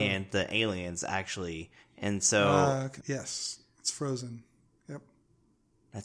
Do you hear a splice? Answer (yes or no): yes